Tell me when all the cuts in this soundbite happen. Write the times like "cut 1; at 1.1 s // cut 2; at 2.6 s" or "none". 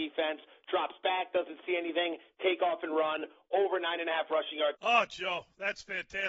cut 1; at 4.7 s